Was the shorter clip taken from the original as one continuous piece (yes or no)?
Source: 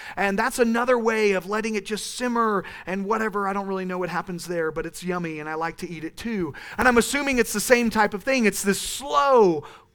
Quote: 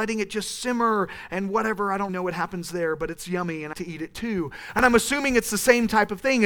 no